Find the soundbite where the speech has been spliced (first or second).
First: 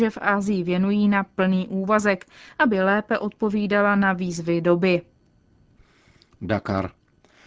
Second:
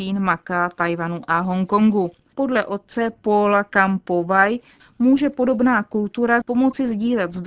second